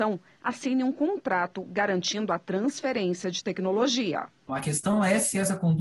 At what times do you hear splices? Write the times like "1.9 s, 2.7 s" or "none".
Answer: 4.5 s